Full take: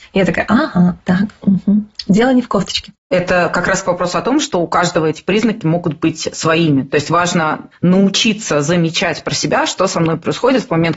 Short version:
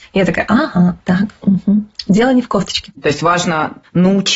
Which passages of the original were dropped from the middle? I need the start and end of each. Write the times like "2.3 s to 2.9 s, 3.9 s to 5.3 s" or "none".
3.0 s to 6.8 s